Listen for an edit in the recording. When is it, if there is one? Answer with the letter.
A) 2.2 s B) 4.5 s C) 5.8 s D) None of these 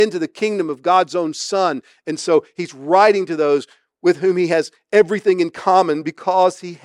D